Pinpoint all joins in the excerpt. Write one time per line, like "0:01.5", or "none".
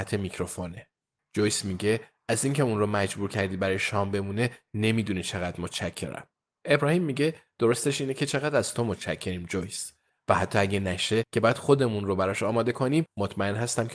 0:01.2
0:10.1